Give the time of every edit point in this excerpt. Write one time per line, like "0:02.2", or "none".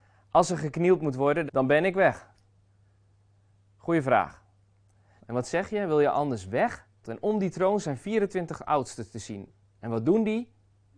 0:01.5
0:05.2
0:07.0